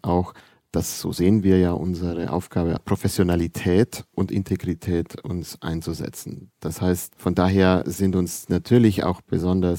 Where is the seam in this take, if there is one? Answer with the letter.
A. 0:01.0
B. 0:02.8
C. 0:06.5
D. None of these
B